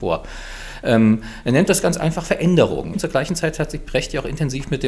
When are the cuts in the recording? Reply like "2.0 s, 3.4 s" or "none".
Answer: 2.9 s